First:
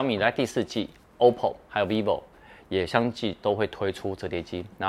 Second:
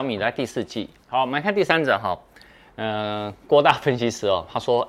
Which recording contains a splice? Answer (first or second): second